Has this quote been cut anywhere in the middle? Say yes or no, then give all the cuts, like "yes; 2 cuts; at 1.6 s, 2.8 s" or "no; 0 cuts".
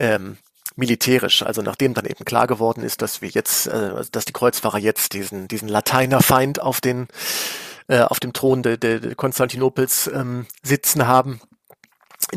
no; 0 cuts